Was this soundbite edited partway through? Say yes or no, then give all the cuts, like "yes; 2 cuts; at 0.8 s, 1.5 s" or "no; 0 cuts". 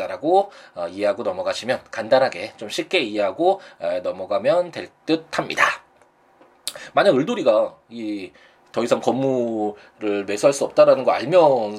no; 0 cuts